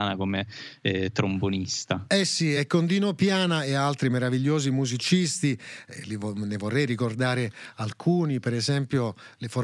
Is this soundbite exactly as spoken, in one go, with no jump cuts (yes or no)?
yes